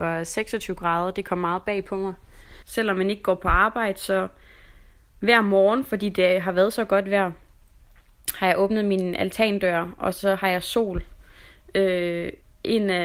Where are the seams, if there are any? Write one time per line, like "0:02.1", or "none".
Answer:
0:02.6